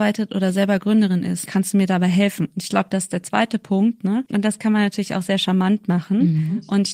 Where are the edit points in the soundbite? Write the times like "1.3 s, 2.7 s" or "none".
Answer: 1.5 s, 4.3 s